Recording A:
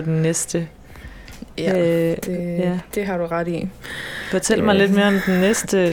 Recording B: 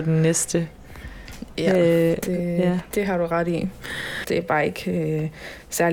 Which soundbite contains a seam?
B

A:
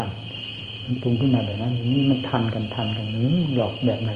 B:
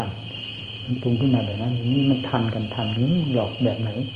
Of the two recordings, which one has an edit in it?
B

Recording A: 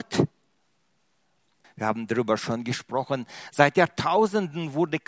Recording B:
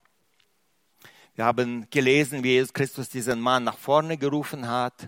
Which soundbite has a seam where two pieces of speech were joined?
A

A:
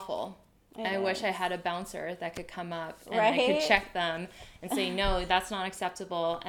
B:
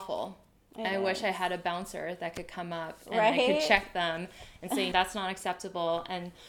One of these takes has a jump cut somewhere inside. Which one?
B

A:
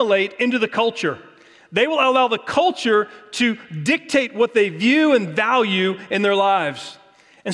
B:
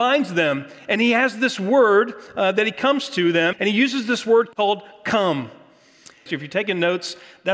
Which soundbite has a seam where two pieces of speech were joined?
B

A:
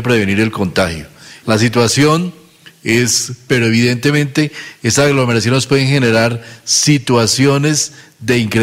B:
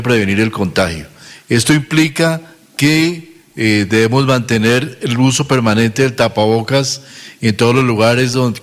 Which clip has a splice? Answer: A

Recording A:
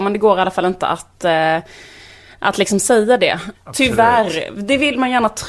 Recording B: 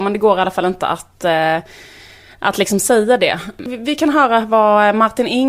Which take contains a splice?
A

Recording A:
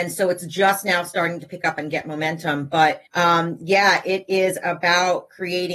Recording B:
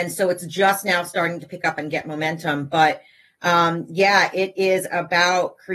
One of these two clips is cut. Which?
A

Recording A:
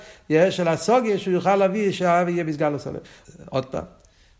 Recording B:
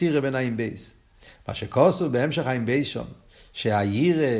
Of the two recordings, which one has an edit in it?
A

